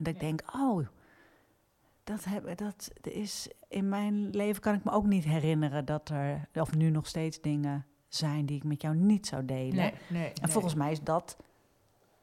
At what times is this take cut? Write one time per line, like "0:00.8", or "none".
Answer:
none